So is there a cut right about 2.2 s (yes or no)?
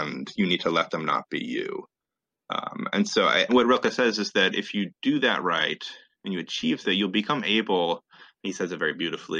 no